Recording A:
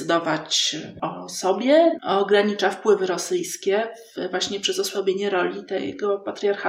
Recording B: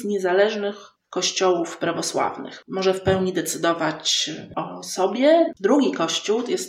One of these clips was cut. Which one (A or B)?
A